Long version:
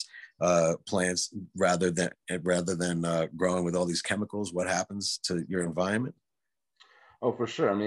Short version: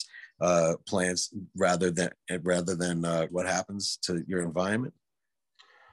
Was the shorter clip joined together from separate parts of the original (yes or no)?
yes